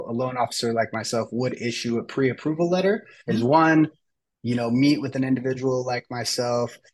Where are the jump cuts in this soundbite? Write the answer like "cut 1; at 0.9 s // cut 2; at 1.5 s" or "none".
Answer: cut 1; at 3.3 s